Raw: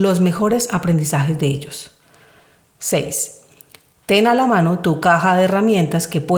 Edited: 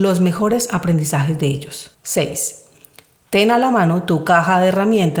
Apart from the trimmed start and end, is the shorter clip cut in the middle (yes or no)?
yes